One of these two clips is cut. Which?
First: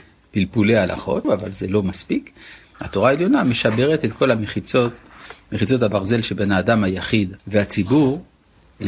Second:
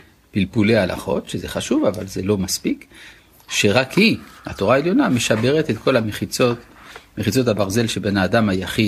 first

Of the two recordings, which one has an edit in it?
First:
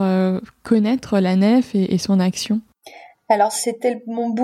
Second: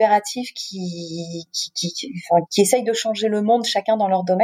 second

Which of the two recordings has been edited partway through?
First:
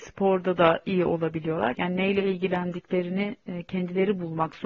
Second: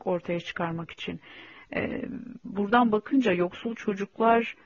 first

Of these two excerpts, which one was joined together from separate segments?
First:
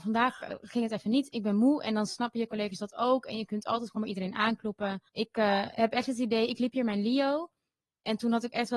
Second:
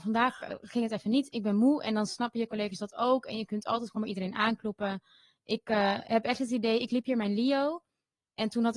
first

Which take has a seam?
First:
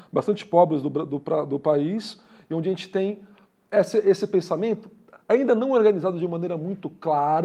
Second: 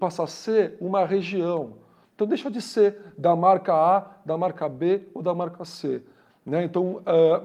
second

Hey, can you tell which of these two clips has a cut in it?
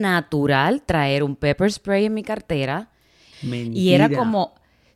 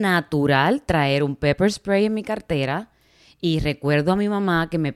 first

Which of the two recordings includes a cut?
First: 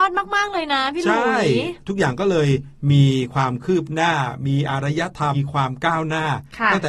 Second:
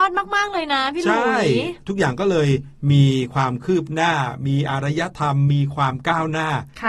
first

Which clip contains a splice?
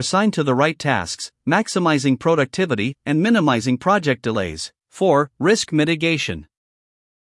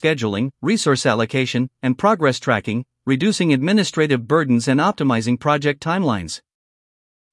first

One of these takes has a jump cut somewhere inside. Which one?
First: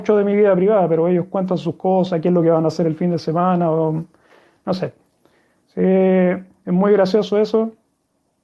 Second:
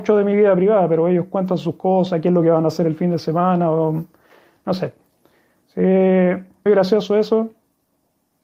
second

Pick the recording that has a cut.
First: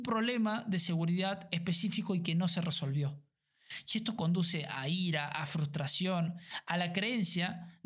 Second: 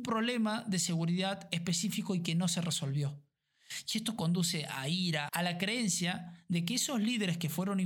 second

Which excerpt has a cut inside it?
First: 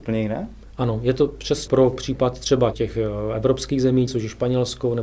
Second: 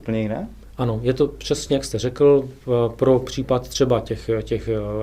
first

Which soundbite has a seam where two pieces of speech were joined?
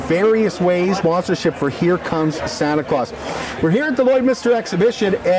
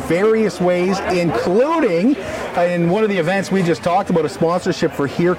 first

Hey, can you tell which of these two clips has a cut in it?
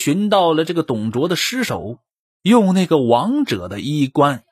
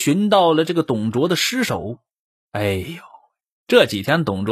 first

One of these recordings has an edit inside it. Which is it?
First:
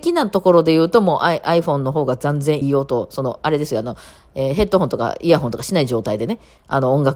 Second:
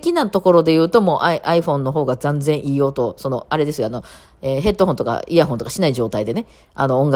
first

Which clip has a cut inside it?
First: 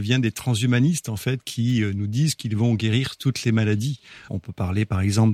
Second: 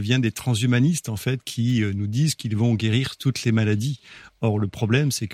first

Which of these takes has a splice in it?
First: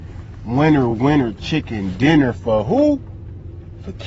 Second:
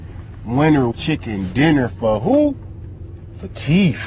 second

